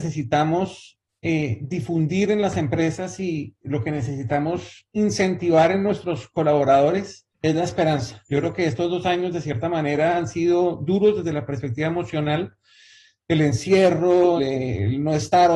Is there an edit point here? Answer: yes; 2 cuts; at 7.3 s, 14.4 s

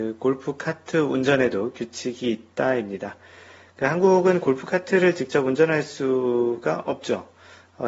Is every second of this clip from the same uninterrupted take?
yes; 0 cuts

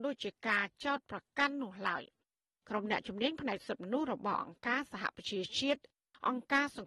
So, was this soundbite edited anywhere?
no; 0 cuts

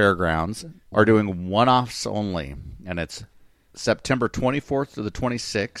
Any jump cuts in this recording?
yes; 1 cut; at 0.9 s

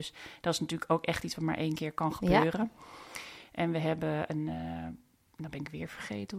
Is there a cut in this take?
no; 0 cuts

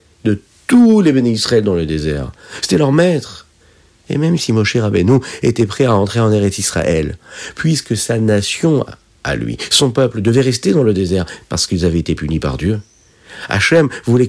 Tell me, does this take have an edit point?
no; 0 cuts

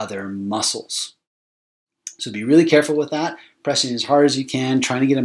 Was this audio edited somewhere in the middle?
no; 0 cuts

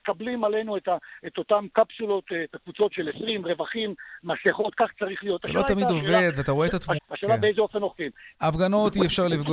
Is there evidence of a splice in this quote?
yes; 2 cuts; at 7.0 s, 8.3 s

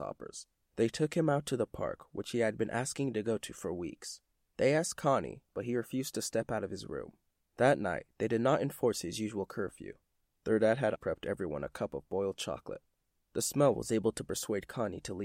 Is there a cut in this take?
yes; 1 cut; at 11.0 s

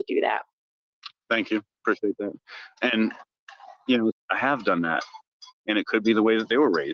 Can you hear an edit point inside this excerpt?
yes; 2 cuts; at 4.1 s, 5.5 s

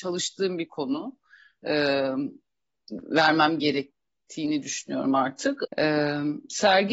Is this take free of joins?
no; 1 cut; at 5.6 s

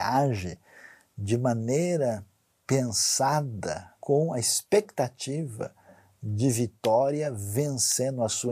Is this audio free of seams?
no; 1 cut; at 4.0 s

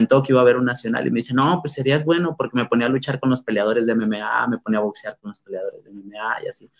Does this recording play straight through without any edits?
yes; 0 cuts

